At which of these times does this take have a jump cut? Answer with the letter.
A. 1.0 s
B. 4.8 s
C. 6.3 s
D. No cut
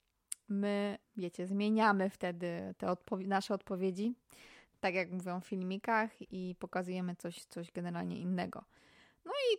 A